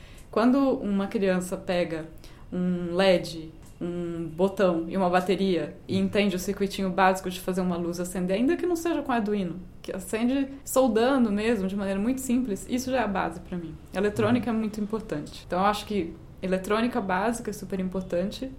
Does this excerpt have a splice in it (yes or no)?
no